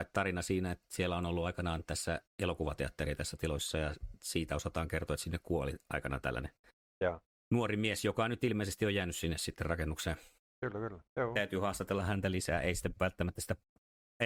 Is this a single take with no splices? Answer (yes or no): no